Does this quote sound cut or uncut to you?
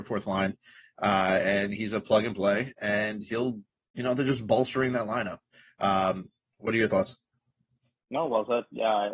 uncut